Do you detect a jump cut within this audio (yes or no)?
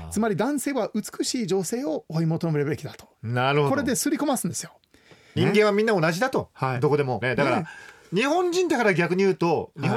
yes